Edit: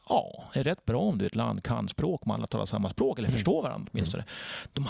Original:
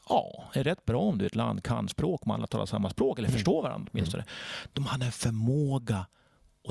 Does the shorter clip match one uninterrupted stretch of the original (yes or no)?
yes